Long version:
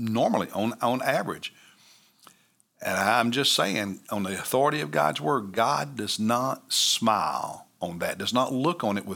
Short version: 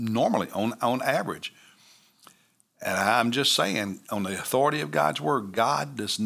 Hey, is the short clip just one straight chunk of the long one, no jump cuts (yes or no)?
yes